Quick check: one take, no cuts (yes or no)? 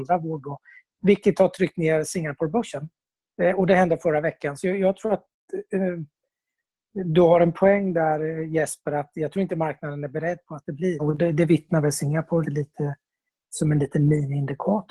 no